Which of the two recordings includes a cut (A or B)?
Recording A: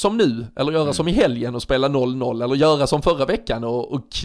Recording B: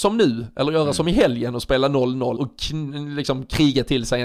B